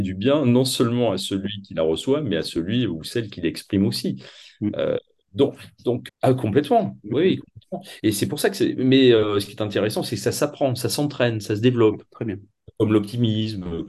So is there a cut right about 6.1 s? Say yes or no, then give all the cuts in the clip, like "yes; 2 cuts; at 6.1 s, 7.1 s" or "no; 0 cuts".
yes; 1 cut; at 6.1 s